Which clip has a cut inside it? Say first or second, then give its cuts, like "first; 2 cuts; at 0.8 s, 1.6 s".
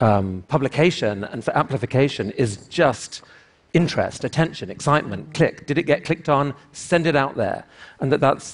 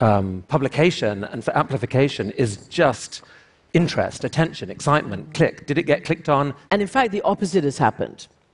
second; 1 cut; at 6.7 s